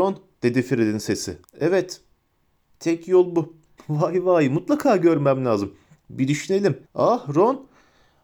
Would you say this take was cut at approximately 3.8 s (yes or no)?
yes